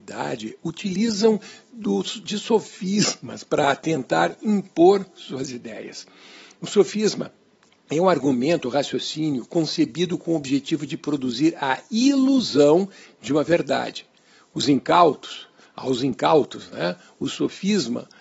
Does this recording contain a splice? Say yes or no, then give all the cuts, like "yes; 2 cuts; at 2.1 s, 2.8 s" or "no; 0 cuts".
no; 0 cuts